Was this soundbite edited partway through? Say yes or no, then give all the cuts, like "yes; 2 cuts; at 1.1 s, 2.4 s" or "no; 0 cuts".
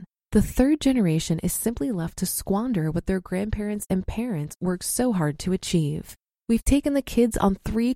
yes; 1 cut; at 6.4 s